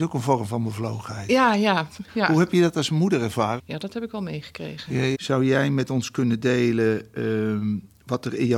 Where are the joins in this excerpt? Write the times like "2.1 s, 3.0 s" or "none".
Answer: 3.6 s, 5.1 s